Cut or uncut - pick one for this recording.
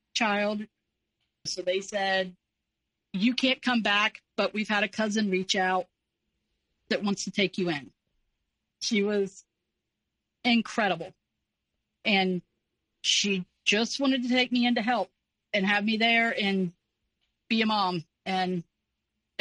cut